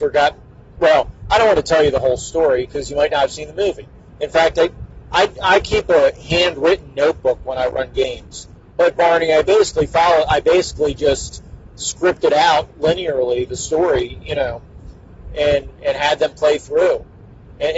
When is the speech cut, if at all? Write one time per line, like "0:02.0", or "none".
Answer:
0:04.1
0:08.7